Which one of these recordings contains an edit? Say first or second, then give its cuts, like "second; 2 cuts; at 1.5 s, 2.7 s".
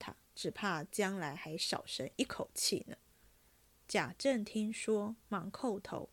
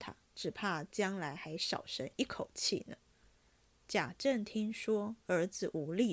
second; 1 cut; at 5.2 s